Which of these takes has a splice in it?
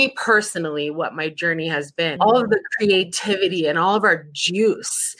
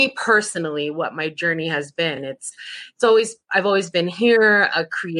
first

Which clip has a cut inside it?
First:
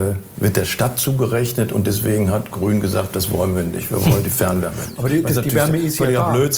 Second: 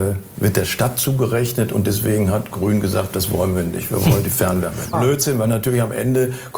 second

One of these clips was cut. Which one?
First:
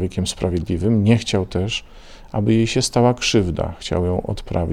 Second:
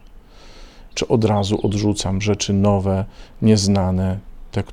second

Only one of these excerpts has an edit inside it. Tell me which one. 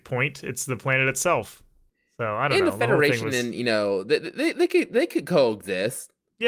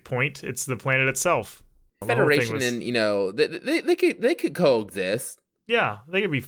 second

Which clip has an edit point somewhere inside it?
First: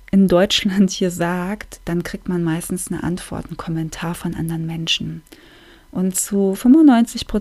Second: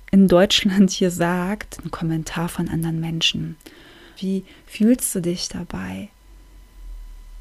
second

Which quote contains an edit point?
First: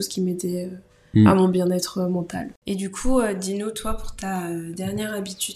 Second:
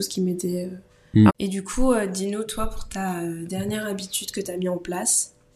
second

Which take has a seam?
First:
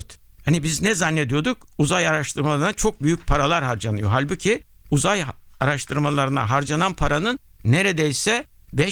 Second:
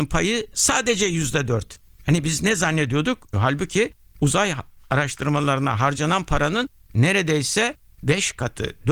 second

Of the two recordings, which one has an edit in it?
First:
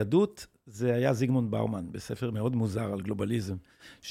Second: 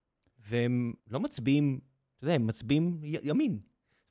second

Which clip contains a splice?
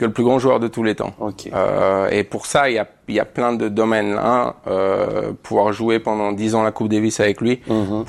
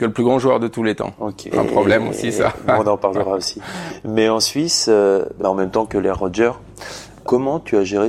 second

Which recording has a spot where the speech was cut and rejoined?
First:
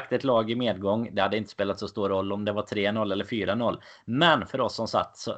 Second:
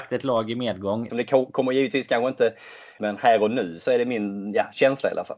second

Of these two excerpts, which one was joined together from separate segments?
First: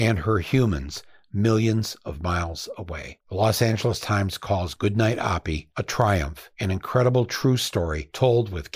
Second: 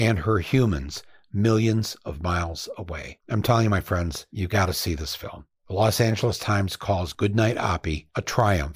first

